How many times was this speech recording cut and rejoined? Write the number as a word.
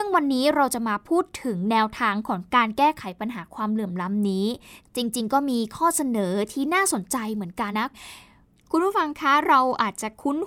one